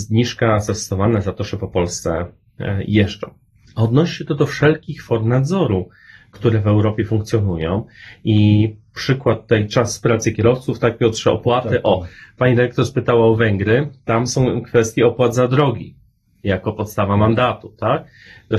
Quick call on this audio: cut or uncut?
cut